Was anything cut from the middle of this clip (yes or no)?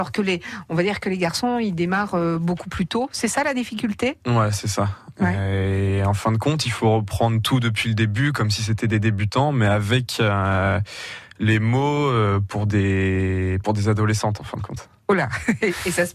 no